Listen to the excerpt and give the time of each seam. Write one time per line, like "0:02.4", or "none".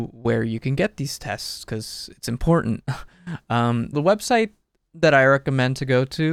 0:03.9